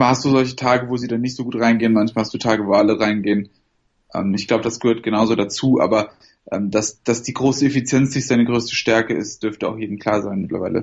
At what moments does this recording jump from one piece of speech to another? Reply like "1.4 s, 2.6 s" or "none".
none